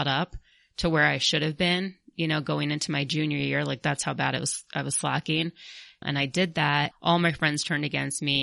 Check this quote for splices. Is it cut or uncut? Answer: cut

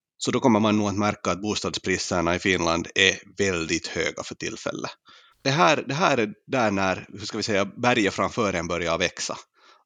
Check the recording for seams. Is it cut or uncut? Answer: cut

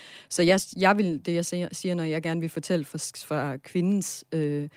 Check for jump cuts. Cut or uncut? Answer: uncut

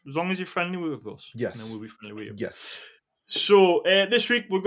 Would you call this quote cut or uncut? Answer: uncut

